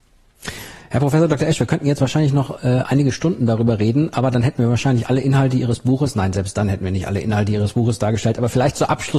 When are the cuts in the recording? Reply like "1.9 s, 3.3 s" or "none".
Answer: none